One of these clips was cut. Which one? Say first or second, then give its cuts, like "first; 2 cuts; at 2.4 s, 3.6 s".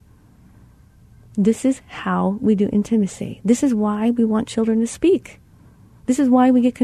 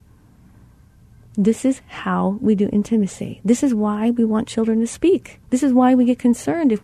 second; 1 cut; at 5.4 s